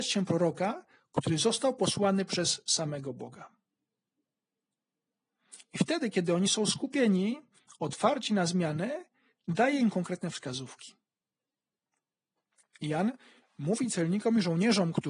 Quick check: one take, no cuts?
yes; 0 cuts

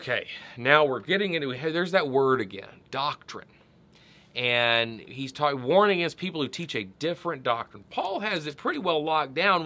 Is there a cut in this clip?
no; 0 cuts

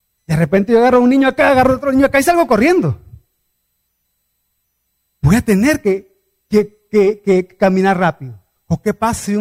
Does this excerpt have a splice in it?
no; 0 cuts

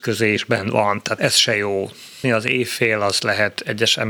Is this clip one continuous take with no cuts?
no; 2 cuts; at 1.2 s, 2.2 s

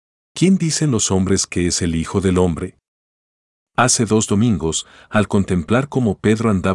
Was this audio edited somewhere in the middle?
yes; 1 cut; at 3.6 s

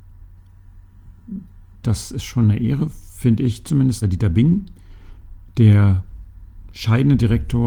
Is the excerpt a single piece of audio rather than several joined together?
no; 2 cuts; at 1.8 s, 4.0 s

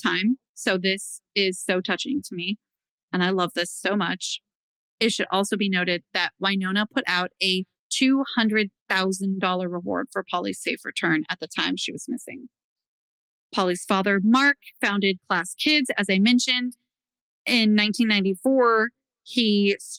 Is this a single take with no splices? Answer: yes; 0 cuts

